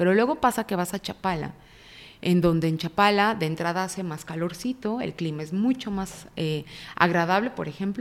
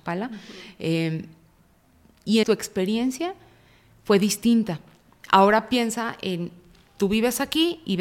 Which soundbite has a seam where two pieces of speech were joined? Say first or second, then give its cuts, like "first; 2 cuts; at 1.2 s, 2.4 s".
second; 1 cut; at 2.4 s